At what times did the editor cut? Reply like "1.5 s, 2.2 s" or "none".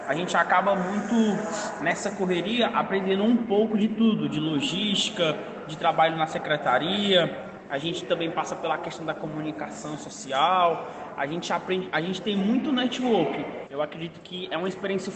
13.7 s